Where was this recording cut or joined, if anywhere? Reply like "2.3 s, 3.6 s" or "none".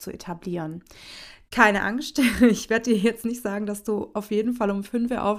none